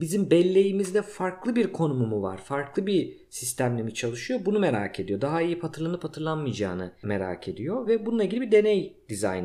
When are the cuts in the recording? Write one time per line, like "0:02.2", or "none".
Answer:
none